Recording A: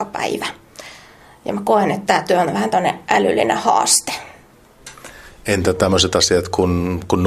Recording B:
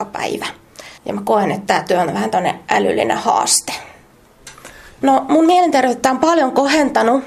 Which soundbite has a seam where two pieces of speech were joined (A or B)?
B